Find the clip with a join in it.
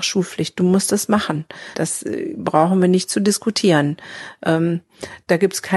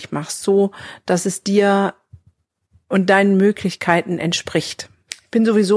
first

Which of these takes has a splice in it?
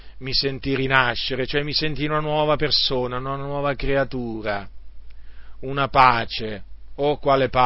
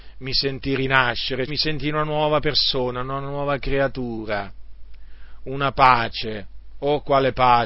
second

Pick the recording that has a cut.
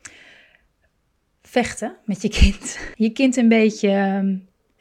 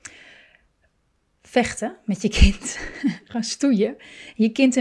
first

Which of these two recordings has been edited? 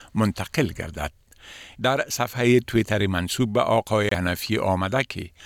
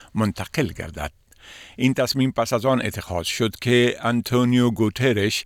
first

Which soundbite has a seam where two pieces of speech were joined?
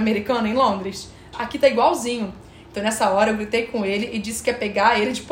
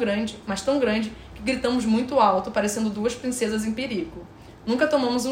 first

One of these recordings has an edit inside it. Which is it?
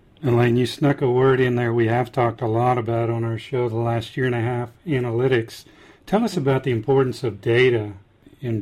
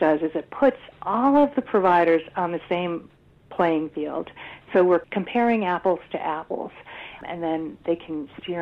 second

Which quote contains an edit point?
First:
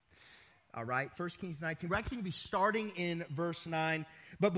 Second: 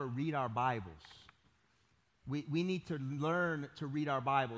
first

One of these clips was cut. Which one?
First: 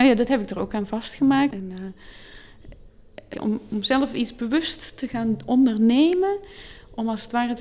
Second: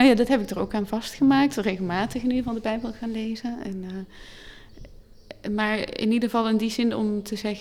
first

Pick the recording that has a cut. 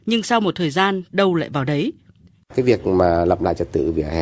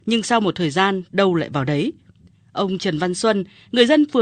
first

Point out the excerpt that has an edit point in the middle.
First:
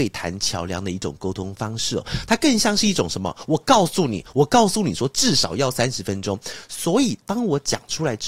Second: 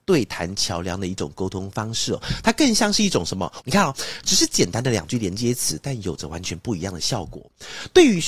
second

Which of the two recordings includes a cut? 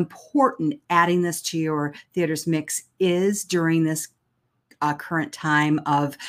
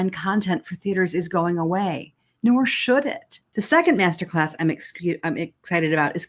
second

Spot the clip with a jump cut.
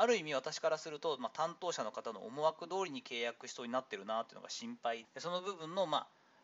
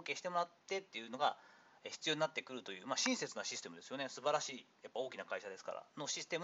first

